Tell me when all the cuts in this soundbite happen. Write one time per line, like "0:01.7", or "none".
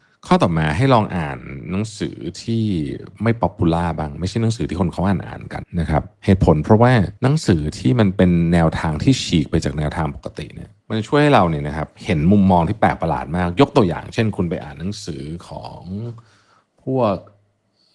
0:05.6
0:07.2
0:10.8

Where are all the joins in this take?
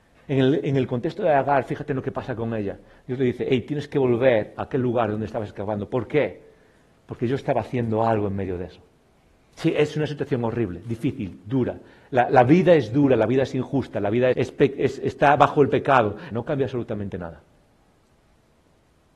0:14.3
0:16.3

